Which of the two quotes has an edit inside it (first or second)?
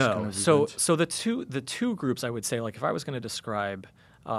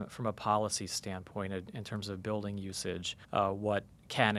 second